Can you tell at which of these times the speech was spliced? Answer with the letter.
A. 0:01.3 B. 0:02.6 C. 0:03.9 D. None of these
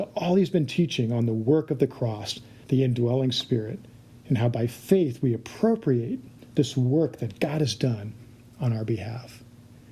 B